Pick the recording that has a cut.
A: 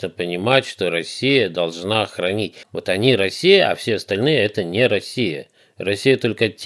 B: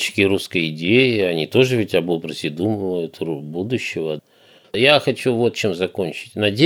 A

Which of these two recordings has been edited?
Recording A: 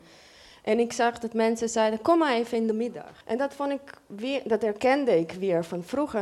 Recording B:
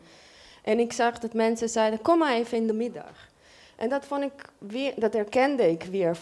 A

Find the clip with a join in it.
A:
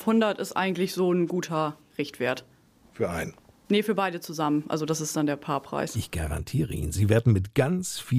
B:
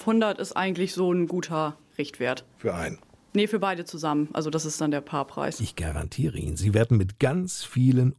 B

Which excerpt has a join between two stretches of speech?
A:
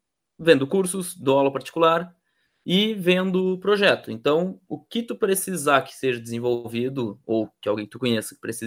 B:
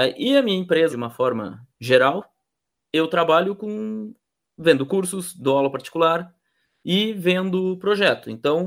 B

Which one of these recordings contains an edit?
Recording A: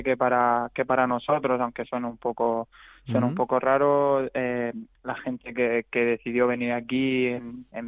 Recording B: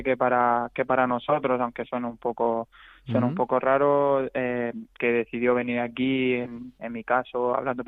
B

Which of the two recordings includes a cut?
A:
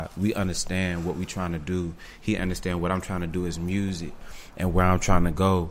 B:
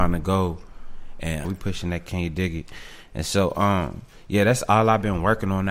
B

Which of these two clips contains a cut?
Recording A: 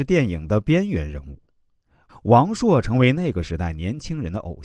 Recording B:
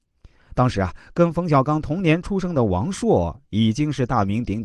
A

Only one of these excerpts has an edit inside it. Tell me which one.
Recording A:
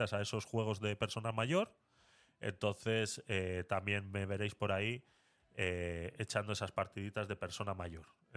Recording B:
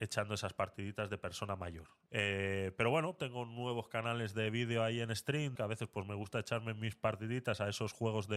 B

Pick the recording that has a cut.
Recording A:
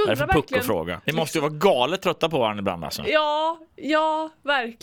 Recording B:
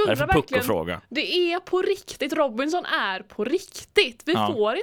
A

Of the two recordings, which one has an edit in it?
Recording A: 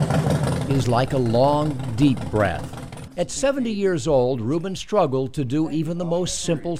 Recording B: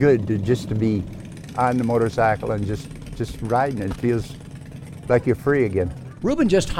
A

